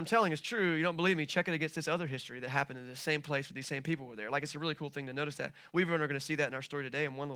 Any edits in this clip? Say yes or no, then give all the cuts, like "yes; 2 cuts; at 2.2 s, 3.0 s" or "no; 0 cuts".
no; 0 cuts